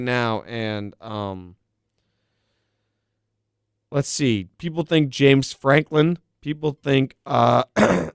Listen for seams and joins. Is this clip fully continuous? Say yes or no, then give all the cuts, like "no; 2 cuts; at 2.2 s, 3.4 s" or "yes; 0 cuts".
yes; 0 cuts